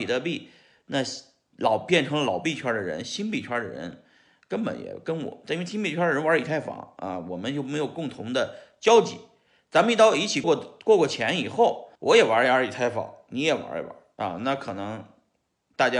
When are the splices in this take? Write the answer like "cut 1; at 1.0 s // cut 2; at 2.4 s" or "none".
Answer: cut 1; at 10.4 s // cut 2; at 12.0 s